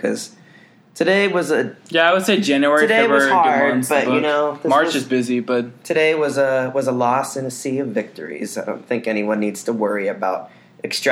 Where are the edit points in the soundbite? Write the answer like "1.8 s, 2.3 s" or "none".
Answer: none